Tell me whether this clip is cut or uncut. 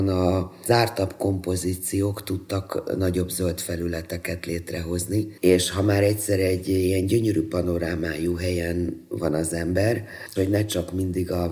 cut